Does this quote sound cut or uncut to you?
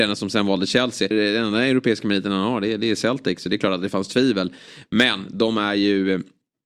cut